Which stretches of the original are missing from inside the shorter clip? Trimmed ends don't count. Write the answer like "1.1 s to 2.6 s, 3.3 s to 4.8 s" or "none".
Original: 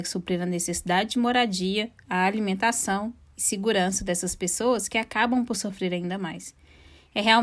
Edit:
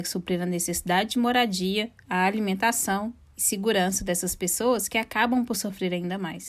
none